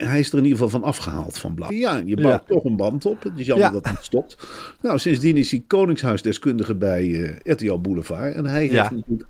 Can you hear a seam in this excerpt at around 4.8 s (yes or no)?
no